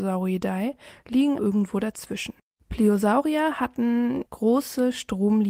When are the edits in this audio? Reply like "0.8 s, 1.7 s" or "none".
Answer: 1.4 s, 4.3 s